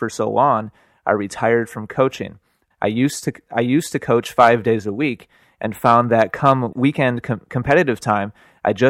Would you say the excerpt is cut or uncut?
cut